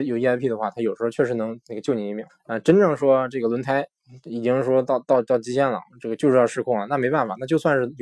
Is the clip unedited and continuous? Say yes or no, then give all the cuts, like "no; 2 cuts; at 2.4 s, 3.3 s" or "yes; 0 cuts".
no; 1 cut; at 2.3 s